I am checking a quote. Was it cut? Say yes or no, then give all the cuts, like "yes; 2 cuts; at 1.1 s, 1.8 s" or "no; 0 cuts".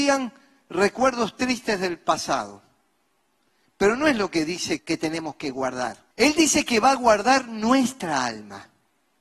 yes; 2 cuts; at 4.8 s, 6.1 s